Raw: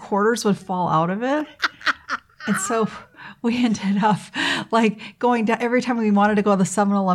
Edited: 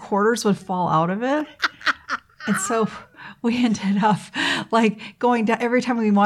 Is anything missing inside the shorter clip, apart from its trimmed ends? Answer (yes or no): no